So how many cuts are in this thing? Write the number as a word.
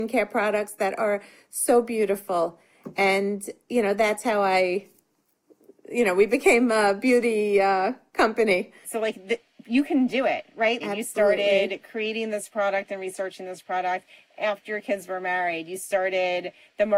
two